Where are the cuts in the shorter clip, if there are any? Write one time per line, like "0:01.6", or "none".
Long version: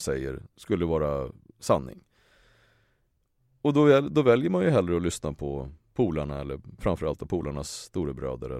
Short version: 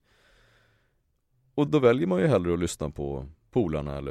0:01.7

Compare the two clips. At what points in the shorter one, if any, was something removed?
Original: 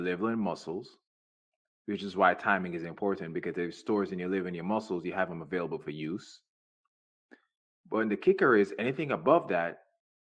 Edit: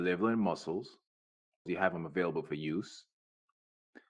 0:01.7

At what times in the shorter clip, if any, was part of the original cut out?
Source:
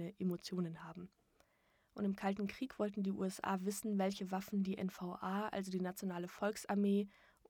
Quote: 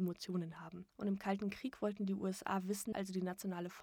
0:00.9
0:02.9

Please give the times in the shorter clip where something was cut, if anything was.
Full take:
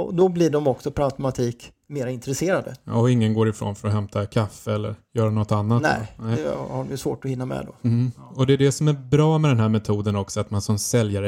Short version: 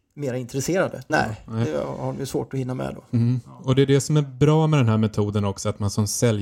0:01.1

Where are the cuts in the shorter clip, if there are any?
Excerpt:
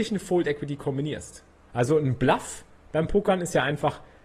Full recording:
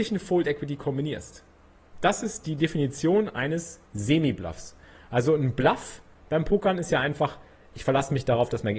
0:01.7

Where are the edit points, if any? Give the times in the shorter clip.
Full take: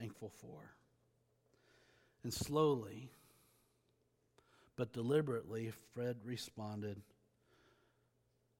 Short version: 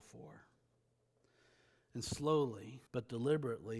0:02.9

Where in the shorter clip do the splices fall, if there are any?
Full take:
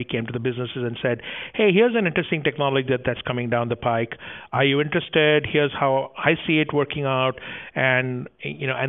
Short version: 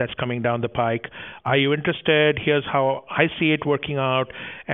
none

